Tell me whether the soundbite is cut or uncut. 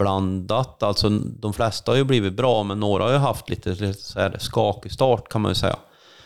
uncut